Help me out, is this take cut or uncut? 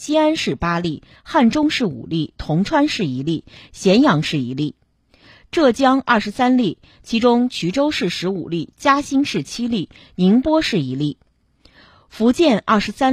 uncut